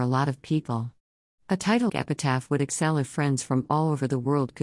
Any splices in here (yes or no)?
yes